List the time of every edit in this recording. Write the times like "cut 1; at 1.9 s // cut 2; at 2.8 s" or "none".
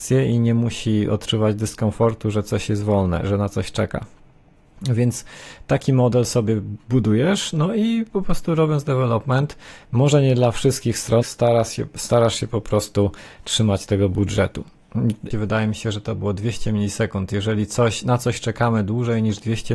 cut 1; at 3.2 s // cut 2; at 11.2 s // cut 3; at 15.3 s

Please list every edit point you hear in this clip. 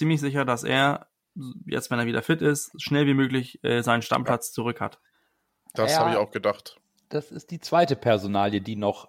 none

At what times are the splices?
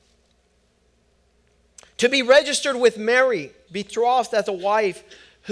cut 1; at 3.7 s

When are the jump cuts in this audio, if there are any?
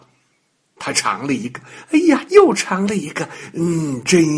cut 1; at 2.3 s

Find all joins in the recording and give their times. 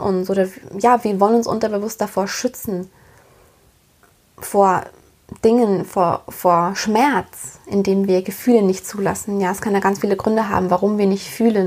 none

